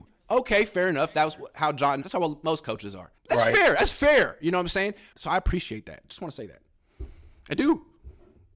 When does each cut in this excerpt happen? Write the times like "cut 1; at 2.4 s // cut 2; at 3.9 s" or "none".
cut 1; at 2.0 s // cut 2; at 3.2 s // cut 3; at 5.1 s